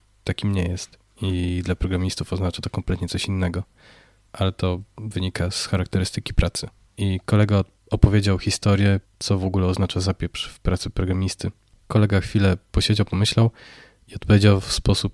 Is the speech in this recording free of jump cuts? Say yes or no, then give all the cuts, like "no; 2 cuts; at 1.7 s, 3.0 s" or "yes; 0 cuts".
no; 2 cuts; at 6.9 s, 9.0 s